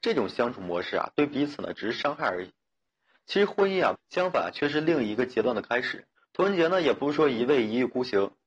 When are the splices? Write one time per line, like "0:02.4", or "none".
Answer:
0:03.9
0:06.2